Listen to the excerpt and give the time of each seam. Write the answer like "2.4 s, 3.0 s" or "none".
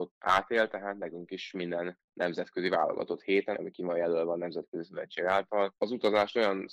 3.5 s, 5.8 s